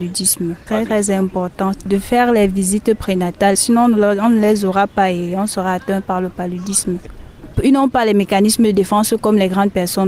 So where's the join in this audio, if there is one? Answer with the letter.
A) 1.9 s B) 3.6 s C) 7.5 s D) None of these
C